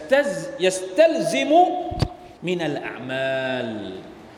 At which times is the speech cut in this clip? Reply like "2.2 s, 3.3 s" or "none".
2.4 s